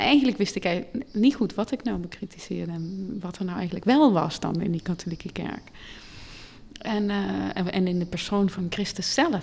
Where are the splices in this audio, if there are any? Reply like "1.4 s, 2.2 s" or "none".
none